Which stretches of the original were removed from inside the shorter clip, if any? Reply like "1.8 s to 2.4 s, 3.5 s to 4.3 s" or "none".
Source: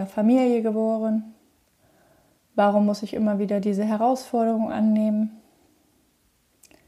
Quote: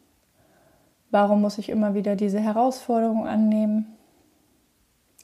none